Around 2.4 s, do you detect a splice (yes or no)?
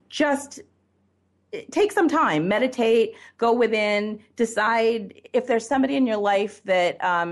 no